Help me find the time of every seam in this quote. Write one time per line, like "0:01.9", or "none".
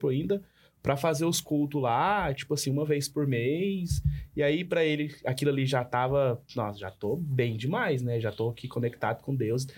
none